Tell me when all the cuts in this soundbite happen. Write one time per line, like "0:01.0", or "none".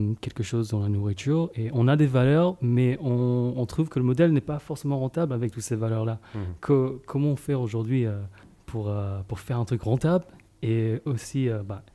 none